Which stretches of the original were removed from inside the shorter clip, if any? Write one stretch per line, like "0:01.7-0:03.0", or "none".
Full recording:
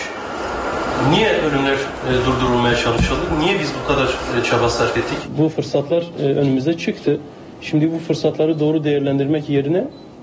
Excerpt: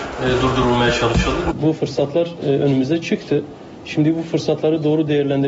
0:03.4-0:05.3

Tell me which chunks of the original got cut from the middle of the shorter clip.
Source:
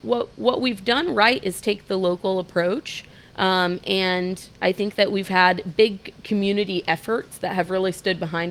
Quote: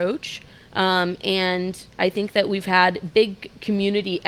none

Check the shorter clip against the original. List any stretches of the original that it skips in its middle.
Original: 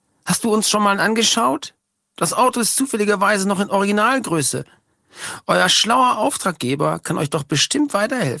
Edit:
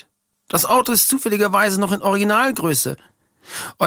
none

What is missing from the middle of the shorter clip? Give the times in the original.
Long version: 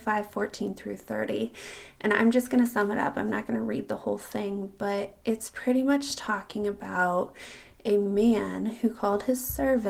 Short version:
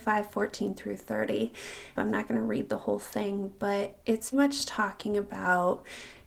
0:01.9-0:03.1
0:05.5-0:05.8

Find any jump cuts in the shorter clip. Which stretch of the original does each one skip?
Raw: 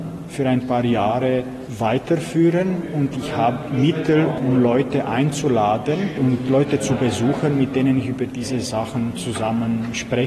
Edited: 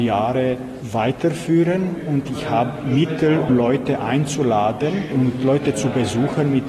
0:04.4-0:04.5

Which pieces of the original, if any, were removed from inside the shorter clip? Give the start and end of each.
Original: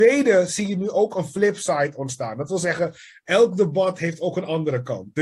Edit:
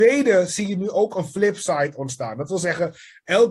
none

